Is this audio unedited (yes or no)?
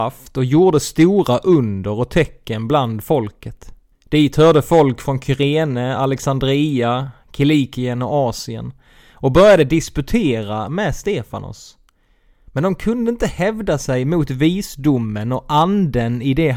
no